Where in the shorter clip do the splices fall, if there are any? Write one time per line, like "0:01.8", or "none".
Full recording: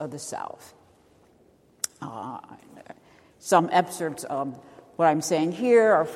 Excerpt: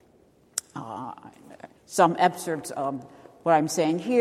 0:01.8

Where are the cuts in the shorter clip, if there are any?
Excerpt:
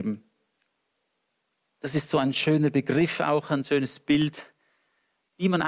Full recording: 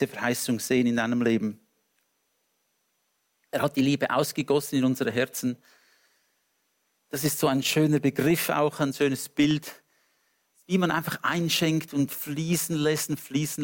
0:01.6

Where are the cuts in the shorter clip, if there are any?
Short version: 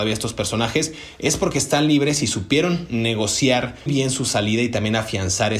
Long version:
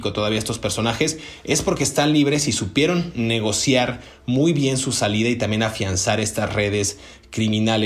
0:03.9

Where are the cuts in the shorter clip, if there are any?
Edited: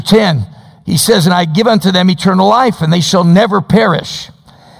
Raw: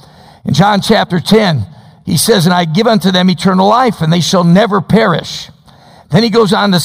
none

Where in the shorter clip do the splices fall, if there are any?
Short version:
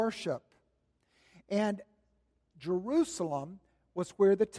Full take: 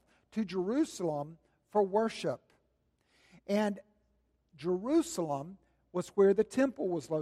none

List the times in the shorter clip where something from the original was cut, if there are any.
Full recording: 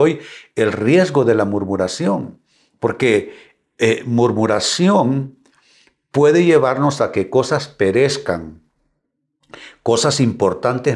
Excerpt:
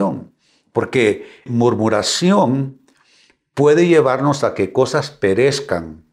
0:01.5

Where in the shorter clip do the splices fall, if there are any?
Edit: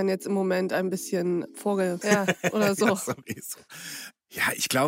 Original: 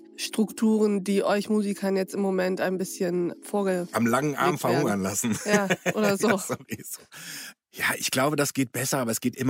0:02.0

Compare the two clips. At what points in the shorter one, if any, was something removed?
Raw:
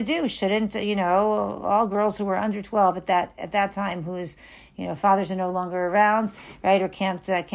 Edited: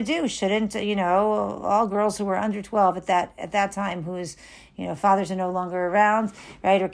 none

